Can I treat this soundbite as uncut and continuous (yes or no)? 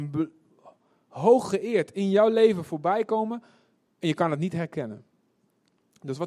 yes